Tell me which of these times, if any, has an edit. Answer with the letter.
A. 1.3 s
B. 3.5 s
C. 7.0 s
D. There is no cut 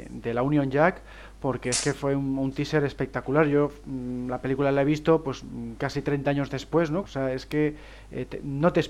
C